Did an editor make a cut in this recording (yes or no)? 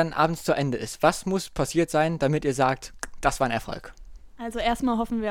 no